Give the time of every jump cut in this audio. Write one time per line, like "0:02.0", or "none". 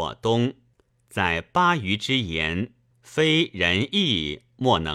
0:00.9
0:02.9